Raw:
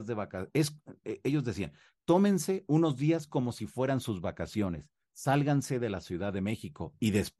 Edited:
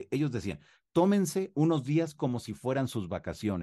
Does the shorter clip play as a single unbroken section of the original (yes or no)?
yes